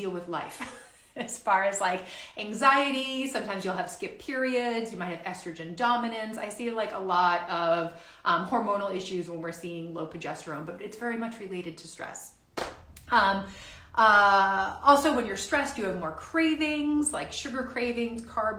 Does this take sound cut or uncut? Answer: uncut